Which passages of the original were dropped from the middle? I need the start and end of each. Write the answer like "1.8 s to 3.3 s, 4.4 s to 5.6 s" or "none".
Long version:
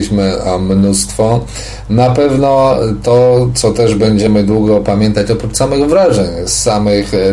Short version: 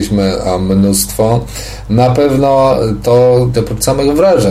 3.5 s to 5.3 s